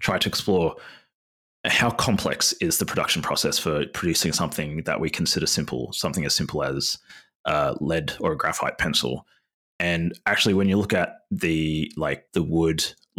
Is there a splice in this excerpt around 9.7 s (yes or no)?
no